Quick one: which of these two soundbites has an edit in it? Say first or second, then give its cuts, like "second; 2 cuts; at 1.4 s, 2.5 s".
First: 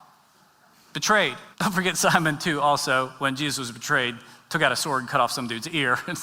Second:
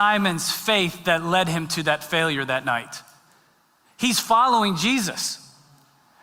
first; 1 cut; at 1.5 s